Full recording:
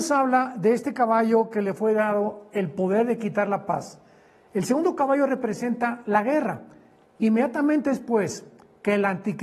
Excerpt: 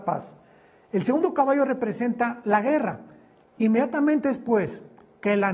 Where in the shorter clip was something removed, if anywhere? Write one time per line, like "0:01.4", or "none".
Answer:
none